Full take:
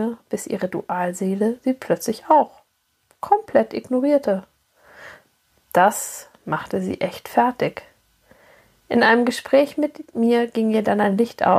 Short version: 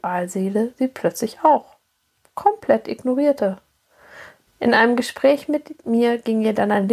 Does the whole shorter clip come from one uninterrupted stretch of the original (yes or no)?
no